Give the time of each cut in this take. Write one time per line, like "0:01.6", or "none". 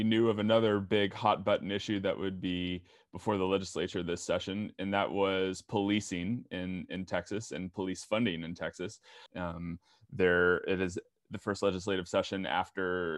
0:09.3